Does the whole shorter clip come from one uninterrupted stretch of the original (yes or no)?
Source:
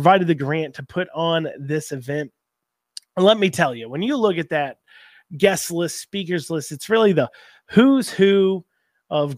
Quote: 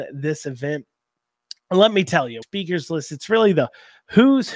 no